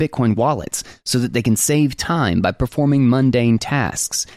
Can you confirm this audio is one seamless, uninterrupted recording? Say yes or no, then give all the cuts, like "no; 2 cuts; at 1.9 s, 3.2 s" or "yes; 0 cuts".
yes; 0 cuts